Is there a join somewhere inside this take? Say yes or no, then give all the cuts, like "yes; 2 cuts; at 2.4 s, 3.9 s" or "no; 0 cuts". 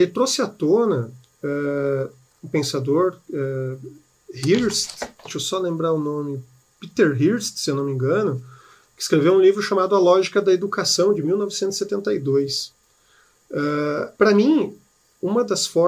no; 0 cuts